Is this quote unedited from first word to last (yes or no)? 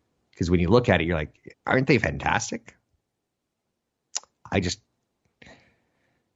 no